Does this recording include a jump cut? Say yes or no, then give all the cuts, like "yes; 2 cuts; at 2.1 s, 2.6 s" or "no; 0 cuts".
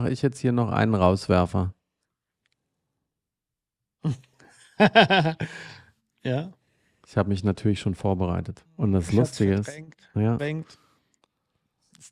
yes; 2 cuts; at 8.7 s, 10.4 s